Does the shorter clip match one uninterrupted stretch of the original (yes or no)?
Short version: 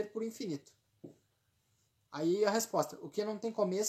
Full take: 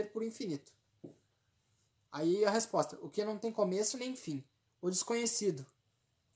yes